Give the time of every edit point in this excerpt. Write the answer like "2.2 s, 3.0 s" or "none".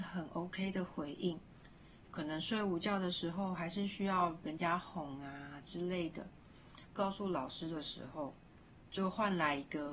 2.0 s, 7.0 s